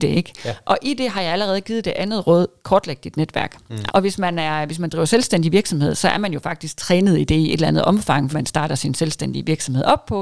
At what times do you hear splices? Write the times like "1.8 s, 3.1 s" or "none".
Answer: 3.9 s, 8.3 s